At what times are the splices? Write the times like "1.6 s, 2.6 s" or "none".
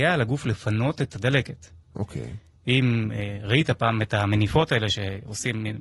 2.6 s